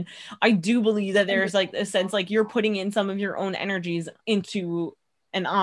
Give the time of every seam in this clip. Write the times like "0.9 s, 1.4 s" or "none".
4.2 s